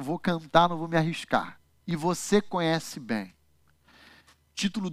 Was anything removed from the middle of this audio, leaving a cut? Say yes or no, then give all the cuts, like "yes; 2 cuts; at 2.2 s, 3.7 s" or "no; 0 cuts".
yes; 1 cut; at 1.8 s